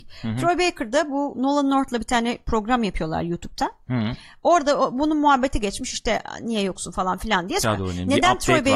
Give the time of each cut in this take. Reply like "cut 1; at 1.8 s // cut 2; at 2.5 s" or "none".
cut 1; at 1.3 s // cut 2; at 7.6 s